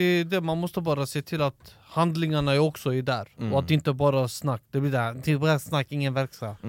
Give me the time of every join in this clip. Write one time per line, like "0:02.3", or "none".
none